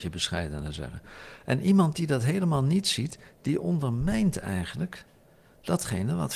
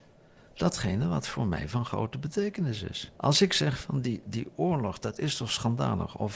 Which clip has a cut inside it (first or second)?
second